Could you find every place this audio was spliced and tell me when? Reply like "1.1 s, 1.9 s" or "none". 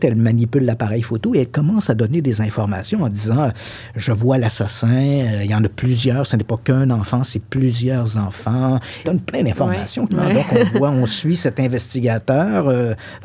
9.0 s, 10.1 s